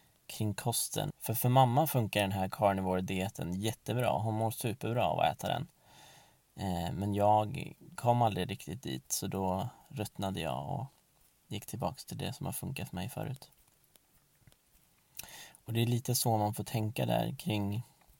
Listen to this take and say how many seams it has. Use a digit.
1